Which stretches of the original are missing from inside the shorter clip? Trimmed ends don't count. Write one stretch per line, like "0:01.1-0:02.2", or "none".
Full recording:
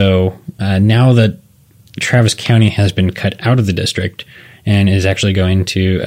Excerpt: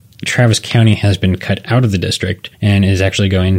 0:04.3-0:04.6

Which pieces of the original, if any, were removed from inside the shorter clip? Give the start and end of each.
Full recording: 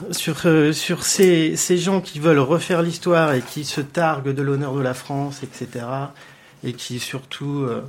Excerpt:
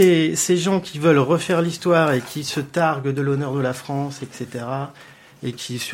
none

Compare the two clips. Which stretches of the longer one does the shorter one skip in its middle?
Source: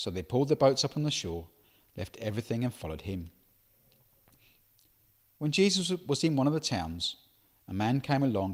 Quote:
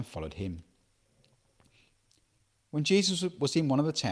none

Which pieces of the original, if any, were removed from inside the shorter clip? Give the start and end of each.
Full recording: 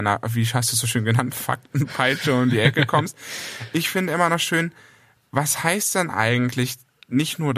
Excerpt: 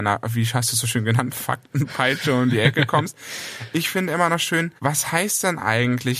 0:04.8-0:05.3

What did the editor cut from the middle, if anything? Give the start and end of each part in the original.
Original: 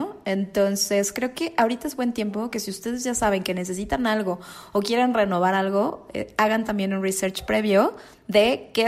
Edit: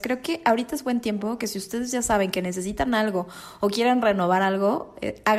none

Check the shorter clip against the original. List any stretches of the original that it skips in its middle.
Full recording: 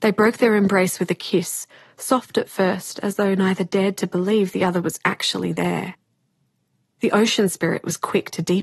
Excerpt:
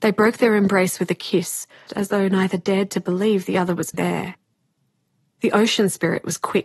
0:01.9-0:02.9
0:05.0-0:05.5

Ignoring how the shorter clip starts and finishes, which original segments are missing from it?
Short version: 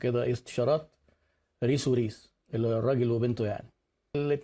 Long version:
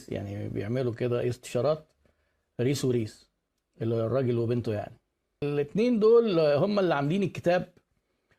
0:03.4-0:03.7

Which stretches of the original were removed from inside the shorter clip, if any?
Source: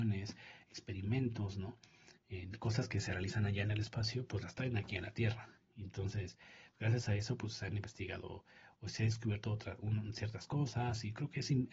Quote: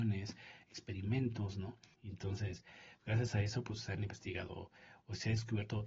0:01.9-0:05.7

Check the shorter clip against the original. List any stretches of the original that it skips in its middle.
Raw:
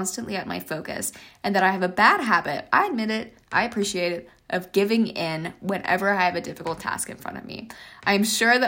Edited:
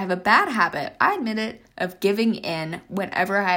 0:03.4-0:04.4

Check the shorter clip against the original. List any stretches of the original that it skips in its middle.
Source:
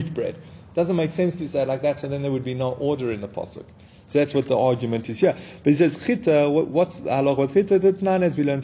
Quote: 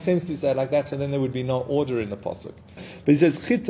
0:03.9-0:05.4

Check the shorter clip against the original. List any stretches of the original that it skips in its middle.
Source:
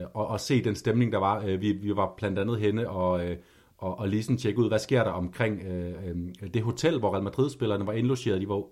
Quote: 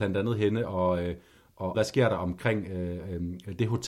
0:04.0-0:04.7

